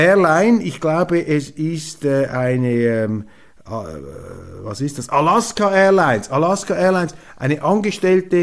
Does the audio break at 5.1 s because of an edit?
no; 0 cuts

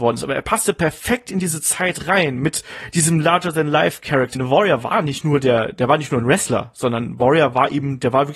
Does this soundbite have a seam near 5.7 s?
no; 1 cut; at 4.3 s

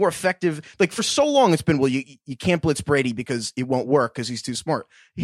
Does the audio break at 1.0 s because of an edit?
no; 0 cuts

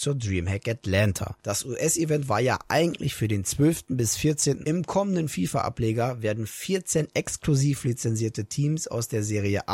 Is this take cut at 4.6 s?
yes; 1 cut; at 4.6 s

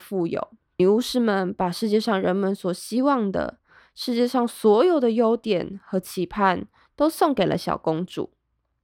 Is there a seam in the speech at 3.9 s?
no; 0 cuts

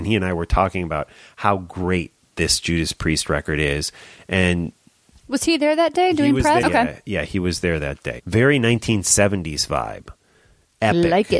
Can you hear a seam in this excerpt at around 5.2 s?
no; 2 cuts; at 6.6 s, 8.2 s

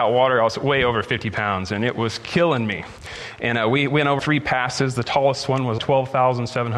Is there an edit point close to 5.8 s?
yes; 2 cuts; at 4.2 s, 5.8 s

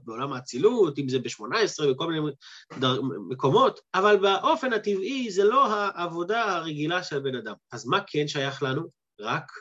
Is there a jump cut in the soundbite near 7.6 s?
no; 1 cut; at 3.8 s

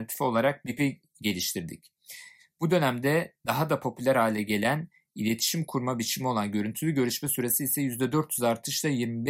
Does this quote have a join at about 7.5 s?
no; 1 cut; at 2.4 s

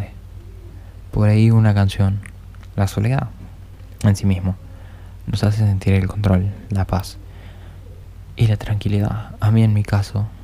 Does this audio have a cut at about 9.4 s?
no; 2 cuts; at 1.1 s, 2.7 s

